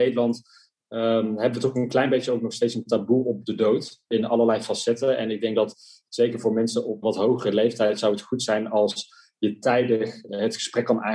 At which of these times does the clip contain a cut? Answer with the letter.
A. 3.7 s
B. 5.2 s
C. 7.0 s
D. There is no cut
C